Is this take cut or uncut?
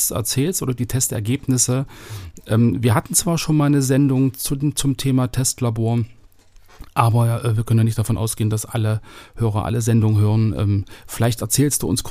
uncut